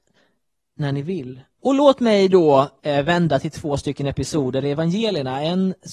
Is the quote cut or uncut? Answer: cut